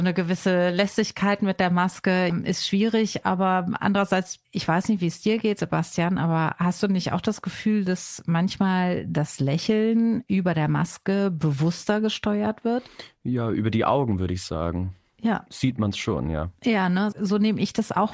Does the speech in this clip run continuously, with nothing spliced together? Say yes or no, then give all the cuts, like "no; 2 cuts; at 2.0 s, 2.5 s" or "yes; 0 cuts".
no; 2 cuts; at 2.3 s, 17.1 s